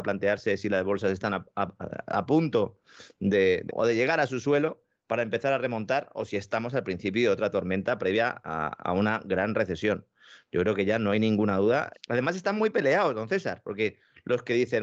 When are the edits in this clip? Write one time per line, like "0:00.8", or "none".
0:03.7
0:11.9